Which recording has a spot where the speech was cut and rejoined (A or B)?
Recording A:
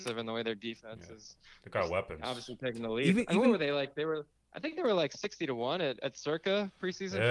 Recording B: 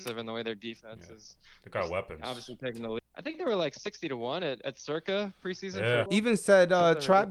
B